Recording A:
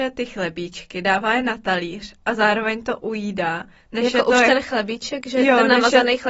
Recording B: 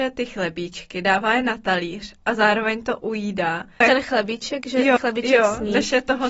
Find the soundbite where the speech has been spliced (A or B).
B